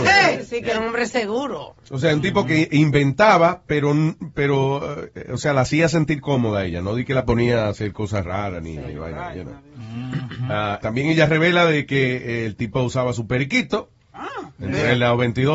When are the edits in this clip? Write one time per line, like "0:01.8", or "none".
0:10.8